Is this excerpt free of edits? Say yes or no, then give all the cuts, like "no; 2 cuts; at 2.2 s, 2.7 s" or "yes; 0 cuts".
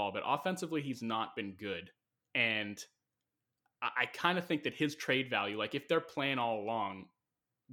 yes; 0 cuts